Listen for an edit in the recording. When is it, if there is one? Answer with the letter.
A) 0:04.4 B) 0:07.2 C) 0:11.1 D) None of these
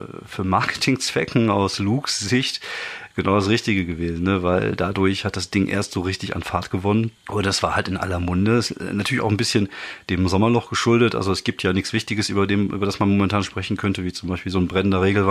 B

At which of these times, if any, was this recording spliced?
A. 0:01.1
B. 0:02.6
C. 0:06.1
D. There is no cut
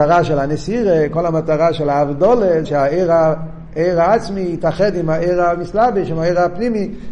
B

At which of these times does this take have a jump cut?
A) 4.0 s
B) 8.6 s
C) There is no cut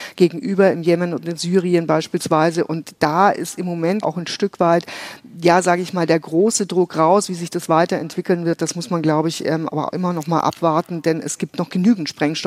A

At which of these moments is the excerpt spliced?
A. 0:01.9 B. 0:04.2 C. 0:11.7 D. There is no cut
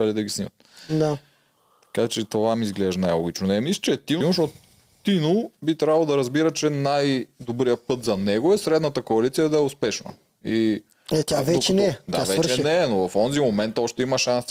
B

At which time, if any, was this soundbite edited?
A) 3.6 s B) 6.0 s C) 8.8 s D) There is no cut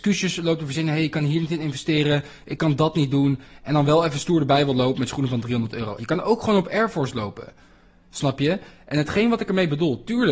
B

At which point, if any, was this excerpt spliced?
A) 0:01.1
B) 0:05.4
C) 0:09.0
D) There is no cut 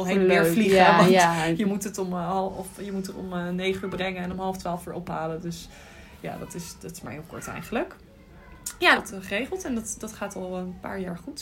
C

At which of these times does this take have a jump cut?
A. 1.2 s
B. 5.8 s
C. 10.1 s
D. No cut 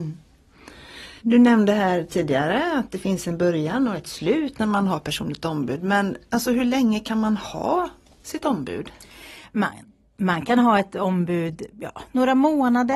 A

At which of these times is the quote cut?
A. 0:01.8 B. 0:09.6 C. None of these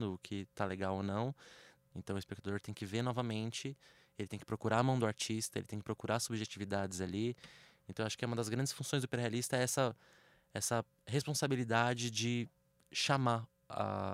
A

